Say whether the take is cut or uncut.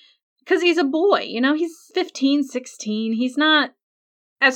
uncut